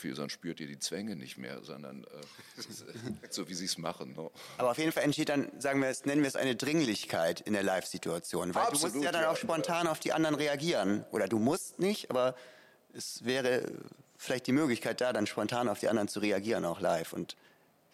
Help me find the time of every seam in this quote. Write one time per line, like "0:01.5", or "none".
0:03.3